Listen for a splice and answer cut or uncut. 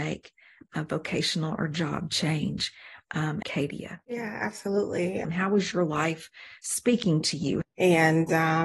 cut